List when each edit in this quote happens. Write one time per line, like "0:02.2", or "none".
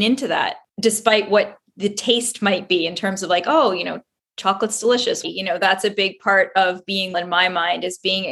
0:05.2
0:07.1